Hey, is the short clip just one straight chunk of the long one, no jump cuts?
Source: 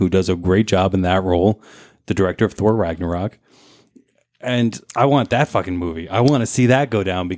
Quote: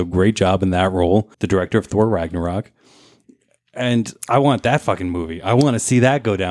no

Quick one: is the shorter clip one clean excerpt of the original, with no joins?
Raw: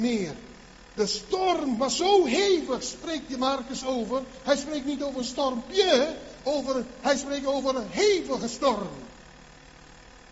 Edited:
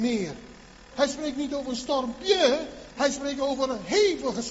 no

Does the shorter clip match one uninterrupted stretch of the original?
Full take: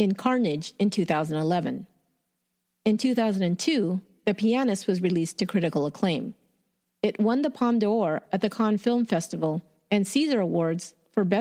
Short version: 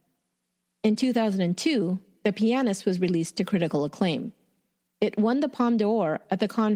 yes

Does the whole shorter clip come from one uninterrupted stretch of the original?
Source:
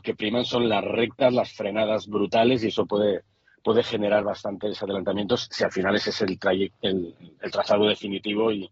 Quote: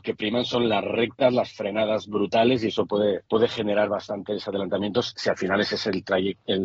no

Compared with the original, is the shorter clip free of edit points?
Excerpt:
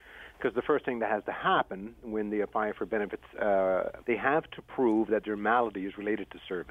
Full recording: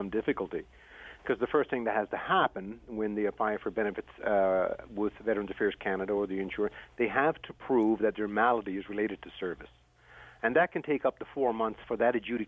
no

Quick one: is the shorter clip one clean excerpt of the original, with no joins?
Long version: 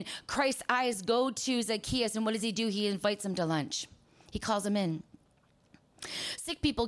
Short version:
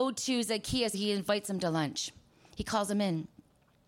no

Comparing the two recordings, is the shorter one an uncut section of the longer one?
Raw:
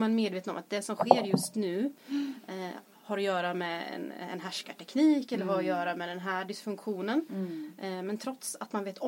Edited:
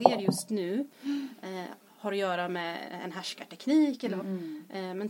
no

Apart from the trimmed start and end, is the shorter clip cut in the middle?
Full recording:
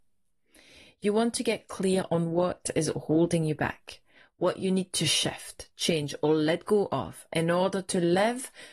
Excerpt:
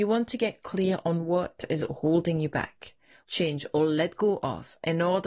yes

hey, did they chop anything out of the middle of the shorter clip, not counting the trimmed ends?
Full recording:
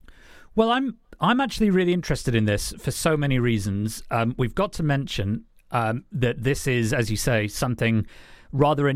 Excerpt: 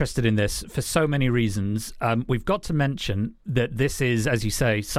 yes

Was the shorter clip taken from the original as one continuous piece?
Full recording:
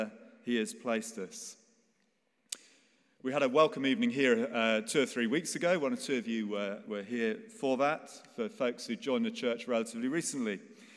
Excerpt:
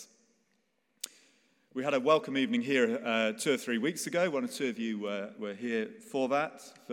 yes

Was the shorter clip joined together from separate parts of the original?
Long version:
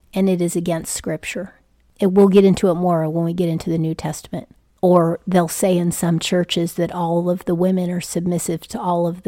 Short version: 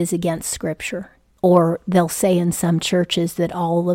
yes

